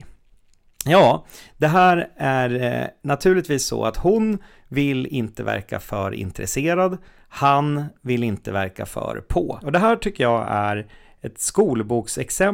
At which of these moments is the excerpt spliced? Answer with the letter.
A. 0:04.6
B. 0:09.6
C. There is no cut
B